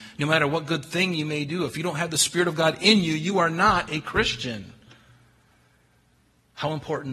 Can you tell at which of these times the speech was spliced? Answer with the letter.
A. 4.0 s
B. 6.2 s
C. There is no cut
C